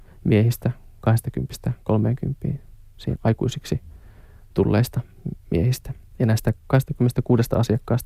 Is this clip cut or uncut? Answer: cut